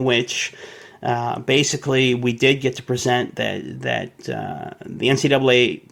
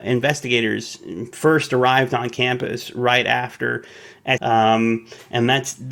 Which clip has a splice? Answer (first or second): second